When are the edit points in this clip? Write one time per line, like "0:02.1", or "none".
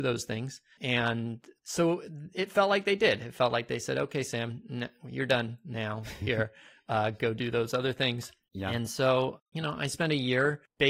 none